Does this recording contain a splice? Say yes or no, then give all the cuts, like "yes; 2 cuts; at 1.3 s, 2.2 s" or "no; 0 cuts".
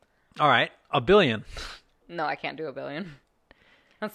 no; 0 cuts